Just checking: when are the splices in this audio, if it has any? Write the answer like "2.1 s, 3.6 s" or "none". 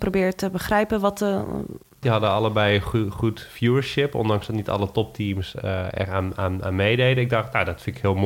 2.0 s